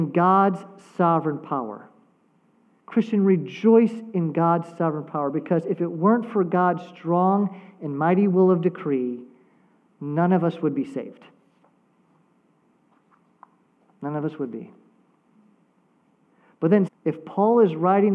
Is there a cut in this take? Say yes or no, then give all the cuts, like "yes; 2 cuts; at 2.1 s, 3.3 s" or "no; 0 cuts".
yes; 1 cut; at 16.9 s